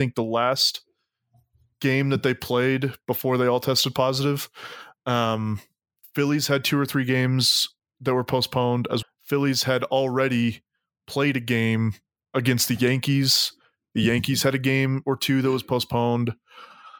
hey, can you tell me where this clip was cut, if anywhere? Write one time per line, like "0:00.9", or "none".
0:09.0